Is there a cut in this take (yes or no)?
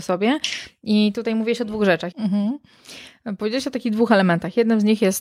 yes